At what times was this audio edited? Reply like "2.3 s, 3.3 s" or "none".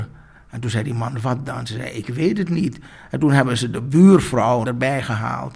4.6 s